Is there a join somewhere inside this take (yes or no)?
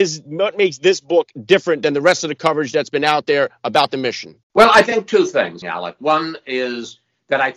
yes